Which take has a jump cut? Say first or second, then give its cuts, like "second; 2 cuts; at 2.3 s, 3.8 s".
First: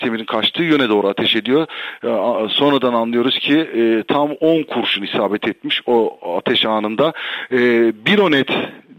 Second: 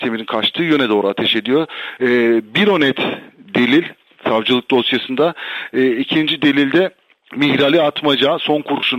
second; 1 cut; at 2.0 s